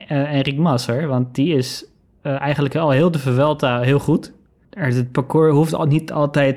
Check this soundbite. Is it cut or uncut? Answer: cut